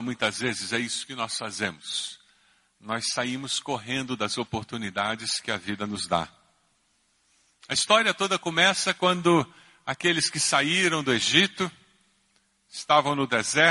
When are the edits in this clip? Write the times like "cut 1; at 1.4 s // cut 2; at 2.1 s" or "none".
none